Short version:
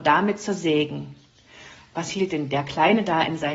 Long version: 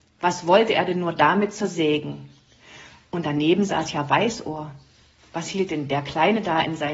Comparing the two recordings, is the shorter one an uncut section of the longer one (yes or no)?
no